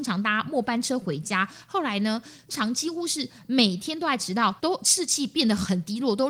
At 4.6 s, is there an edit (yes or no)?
yes